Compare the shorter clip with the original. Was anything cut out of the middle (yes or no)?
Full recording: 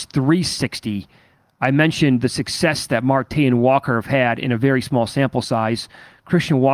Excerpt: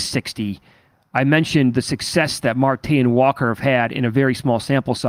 no